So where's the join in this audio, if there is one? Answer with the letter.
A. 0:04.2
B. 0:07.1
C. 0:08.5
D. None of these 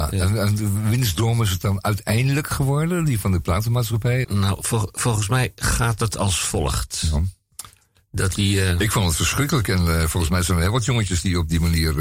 A